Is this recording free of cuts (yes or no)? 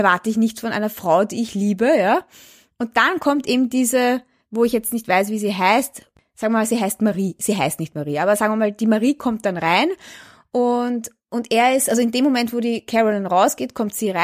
yes